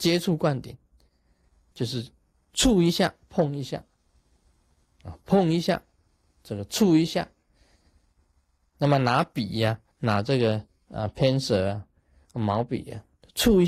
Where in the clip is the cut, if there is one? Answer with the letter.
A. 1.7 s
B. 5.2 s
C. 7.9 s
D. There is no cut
A